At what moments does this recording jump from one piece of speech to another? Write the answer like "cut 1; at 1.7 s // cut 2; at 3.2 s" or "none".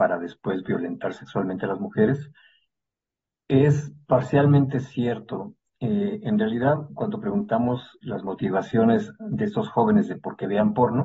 none